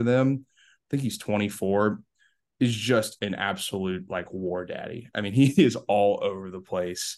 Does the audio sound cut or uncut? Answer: uncut